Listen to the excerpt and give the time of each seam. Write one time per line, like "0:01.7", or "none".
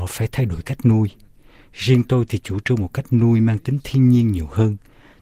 none